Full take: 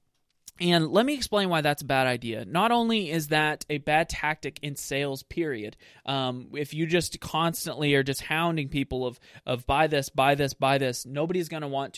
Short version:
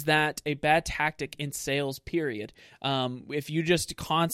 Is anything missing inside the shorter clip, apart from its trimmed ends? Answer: no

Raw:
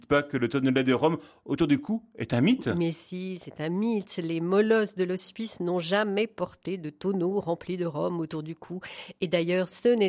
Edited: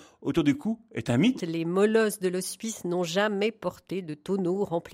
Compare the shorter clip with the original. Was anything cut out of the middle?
yes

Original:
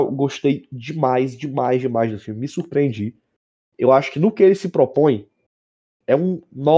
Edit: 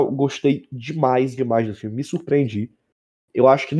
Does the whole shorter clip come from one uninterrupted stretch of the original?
no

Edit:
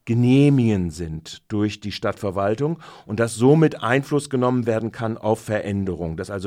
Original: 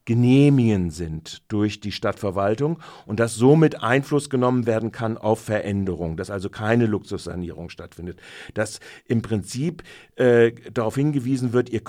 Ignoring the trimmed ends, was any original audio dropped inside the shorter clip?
no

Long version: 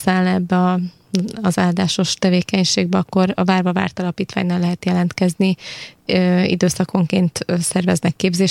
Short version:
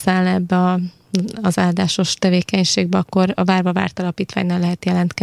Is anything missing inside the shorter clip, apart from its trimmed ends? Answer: no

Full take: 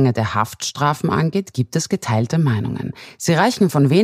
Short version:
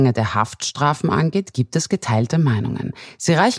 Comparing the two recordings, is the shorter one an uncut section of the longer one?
yes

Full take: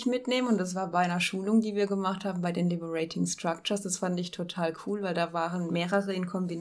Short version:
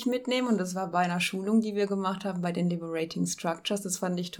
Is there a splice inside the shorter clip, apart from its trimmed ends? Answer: no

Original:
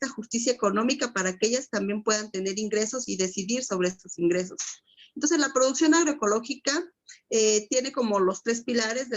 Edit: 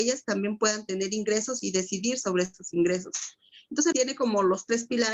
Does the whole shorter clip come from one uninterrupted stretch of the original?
no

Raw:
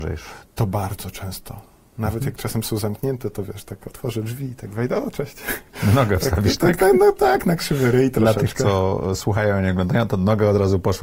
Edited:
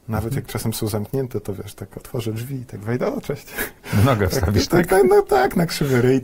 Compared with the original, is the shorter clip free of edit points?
yes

